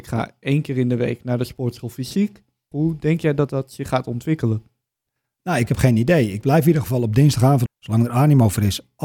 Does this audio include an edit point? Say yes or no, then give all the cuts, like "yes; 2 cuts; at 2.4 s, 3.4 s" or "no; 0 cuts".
yes; 2 cuts; at 2.7 s, 7.7 s